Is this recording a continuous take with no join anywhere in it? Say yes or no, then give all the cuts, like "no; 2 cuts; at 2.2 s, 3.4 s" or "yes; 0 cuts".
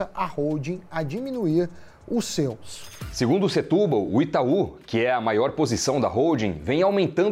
yes; 0 cuts